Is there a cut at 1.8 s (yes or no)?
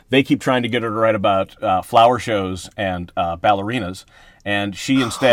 no